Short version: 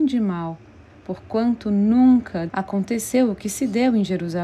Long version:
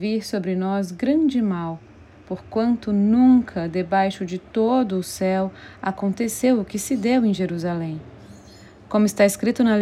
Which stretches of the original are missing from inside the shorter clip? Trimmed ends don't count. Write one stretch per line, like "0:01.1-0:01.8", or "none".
0:03.7-0:05.8